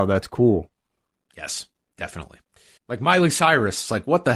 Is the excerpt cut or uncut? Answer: cut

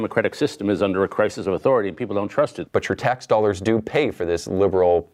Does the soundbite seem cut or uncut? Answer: cut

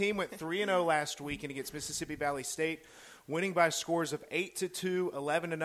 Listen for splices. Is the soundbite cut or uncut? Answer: uncut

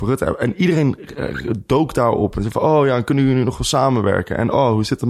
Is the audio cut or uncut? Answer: uncut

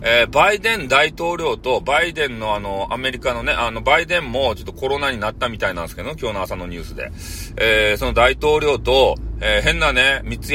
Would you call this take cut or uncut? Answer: uncut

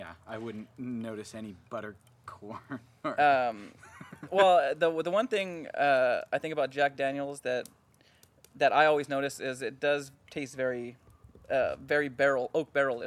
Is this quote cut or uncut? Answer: uncut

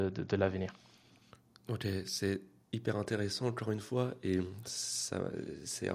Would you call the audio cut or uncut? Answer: uncut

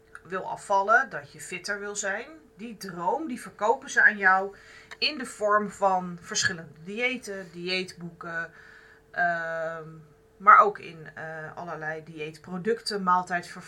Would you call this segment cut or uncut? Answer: uncut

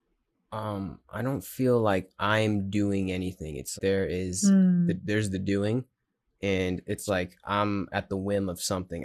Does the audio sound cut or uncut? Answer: cut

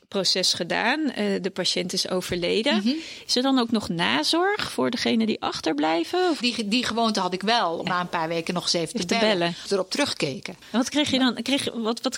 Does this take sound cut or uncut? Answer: cut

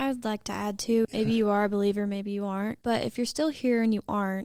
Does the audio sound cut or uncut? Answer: uncut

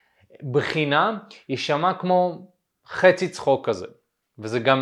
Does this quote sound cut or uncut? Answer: uncut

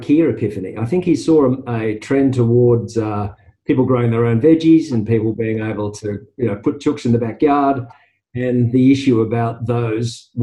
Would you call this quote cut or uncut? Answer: uncut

